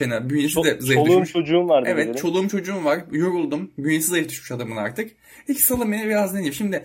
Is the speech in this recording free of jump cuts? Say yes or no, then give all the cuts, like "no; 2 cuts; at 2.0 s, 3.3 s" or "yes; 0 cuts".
yes; 0 cuts